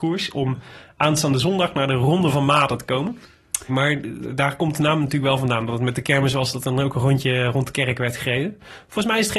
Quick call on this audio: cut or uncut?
cut